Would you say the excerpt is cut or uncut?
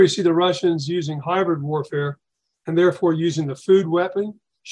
uncut